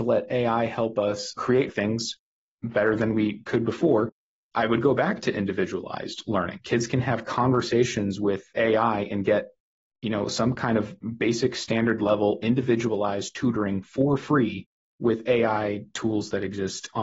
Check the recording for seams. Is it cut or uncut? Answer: uncut